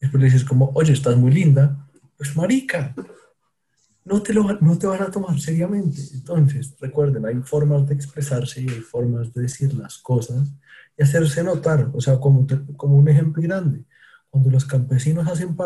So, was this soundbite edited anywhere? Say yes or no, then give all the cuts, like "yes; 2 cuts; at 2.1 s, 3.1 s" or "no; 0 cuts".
yes; 1 cut; at 13.4 s